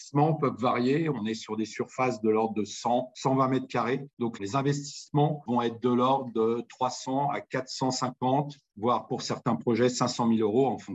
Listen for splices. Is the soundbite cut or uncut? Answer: uncut